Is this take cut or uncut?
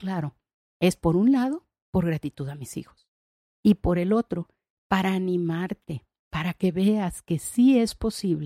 uncut